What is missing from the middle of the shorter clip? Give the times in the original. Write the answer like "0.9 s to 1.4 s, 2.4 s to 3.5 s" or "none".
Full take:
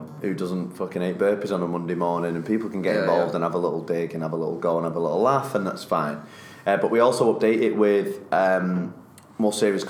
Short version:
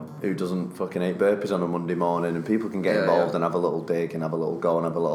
none